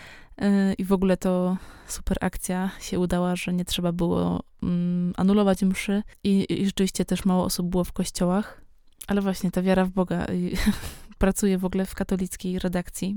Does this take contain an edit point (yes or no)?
no